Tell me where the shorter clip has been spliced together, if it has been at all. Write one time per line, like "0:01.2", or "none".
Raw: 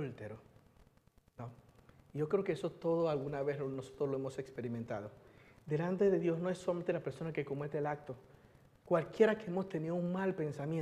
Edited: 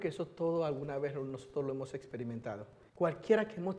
0:02.9